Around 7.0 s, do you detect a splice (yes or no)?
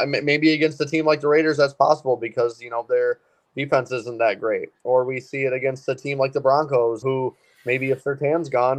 yes